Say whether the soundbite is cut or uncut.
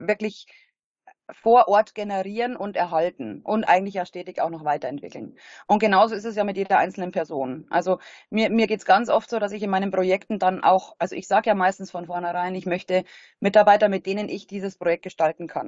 uncut